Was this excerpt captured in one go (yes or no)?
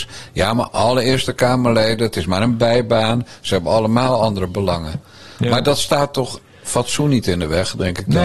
yes